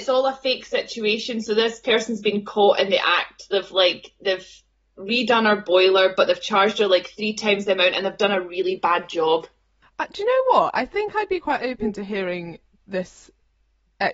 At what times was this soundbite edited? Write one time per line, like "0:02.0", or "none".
0:09.8